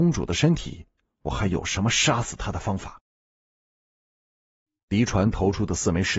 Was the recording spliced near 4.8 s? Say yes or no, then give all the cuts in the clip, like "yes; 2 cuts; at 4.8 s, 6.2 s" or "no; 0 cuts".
yes; 1 cut; at 4.8 s